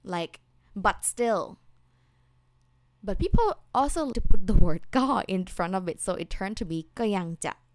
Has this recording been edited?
yes; 1 cut; at 4.1 s

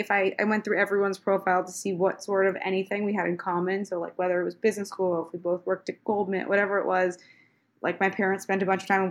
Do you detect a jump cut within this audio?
no; 0 cuts

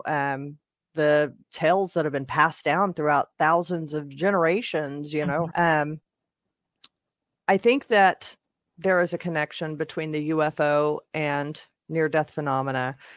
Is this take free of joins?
no; 1 cut; at 5.5 s

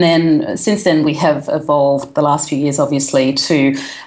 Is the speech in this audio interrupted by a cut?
no; 0 cuts

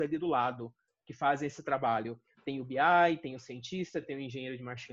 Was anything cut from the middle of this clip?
no; 0 cuts

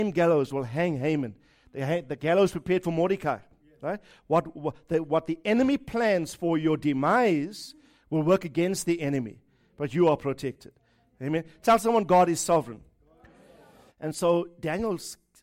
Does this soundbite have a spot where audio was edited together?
yes; 1 cut; at 13.9 s

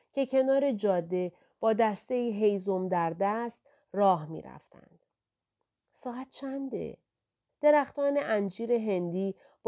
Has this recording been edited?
yes; 1 cut; at 7.5 s

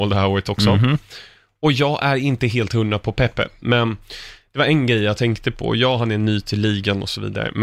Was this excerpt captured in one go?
no; 1 cut; at 3.6 s

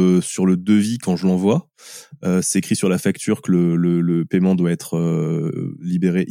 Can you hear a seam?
no; 0 cuts

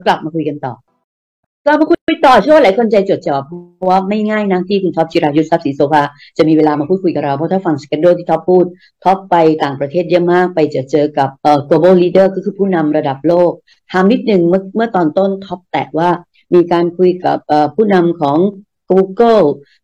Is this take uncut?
no; 2 cuts; at 3.2 s, 11.4 s

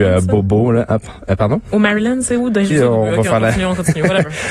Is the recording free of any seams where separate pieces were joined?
no; 1 cut; at 2.7 s

